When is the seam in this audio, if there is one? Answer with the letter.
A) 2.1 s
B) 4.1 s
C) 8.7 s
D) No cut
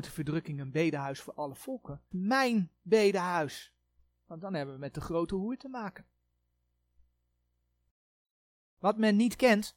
A